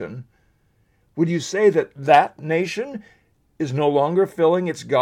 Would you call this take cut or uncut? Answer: uncut